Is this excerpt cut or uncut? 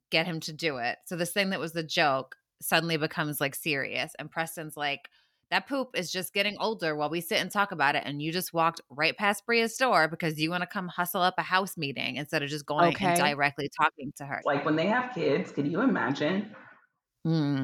cut